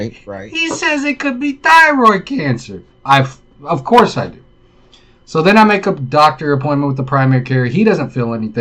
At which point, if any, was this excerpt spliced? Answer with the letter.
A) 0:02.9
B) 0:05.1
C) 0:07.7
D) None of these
A